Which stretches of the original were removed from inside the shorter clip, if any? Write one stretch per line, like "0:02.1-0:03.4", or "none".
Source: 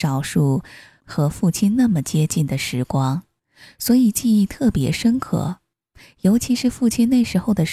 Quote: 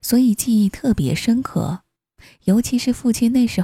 none